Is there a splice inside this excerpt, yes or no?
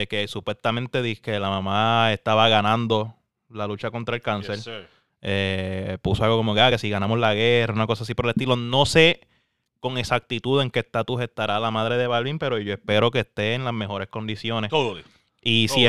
no